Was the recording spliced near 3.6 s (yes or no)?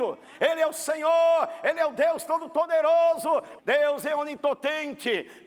yes